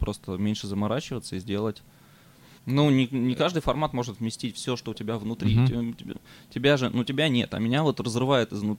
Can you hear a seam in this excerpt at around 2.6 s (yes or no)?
yes